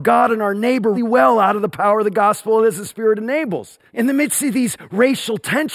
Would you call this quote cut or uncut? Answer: cut